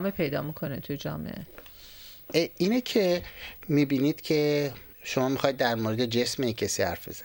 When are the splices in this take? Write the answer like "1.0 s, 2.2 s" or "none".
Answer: 4.9 s